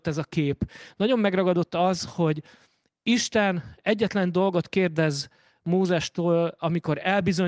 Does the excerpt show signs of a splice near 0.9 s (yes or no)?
no